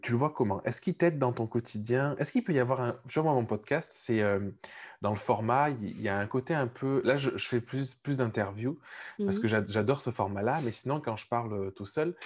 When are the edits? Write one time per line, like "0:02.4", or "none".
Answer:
none